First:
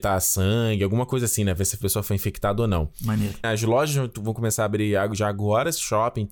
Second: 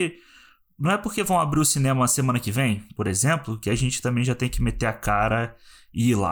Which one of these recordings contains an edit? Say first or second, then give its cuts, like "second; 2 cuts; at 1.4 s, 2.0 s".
first; 1 cut; at 3.4 s